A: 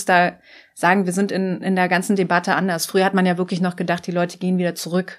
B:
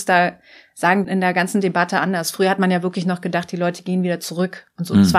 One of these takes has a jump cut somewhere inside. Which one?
B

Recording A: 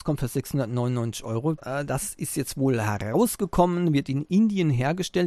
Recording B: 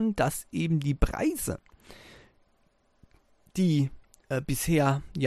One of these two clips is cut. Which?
A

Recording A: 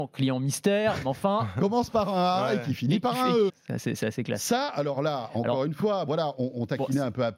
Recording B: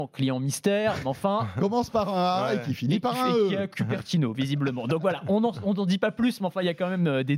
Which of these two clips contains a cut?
A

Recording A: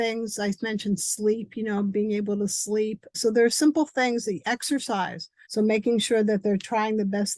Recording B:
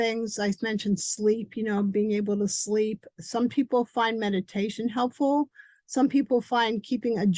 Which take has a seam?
A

